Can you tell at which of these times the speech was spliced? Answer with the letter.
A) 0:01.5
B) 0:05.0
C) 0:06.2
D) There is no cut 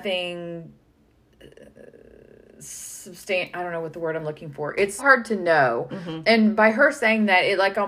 B